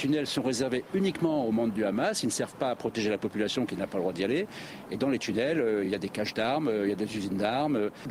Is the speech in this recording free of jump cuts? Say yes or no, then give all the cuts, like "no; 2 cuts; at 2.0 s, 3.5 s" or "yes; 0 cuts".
yes; 0 cuts